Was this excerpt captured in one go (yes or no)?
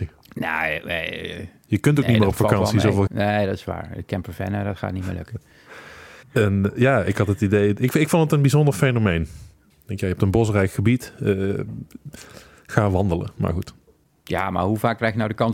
no